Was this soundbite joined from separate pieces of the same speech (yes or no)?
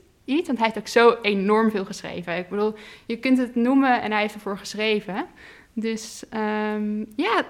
no